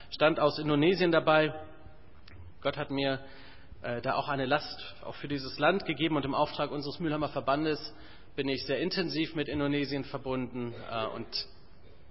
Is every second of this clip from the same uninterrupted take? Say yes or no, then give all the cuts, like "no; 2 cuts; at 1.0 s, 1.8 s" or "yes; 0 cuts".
yes; 0 cuts